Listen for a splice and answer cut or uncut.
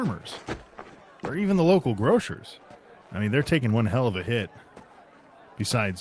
uncut